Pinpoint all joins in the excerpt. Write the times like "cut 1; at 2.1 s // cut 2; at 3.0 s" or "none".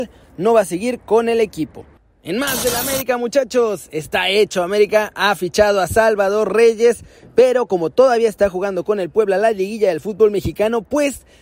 none